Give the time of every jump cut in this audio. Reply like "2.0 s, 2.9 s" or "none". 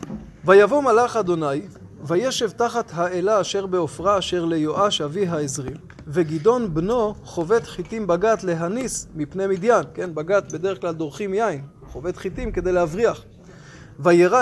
none